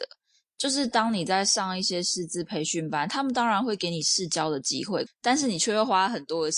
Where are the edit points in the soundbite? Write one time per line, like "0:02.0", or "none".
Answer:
0:05.1